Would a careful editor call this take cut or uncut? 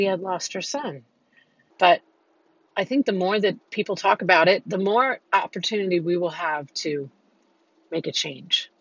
cut